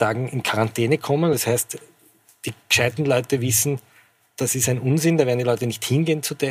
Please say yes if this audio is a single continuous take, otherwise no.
yes